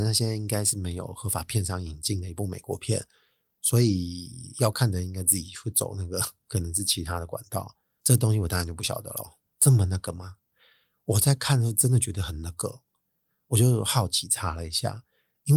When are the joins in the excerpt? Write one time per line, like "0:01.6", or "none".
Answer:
0:09.5